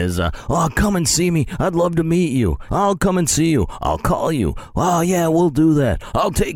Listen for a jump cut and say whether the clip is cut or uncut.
cut